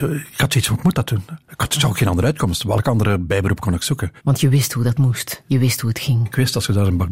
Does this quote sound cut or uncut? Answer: cut